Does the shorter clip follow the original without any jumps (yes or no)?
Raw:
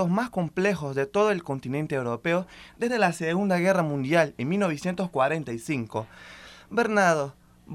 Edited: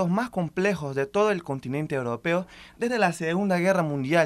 yes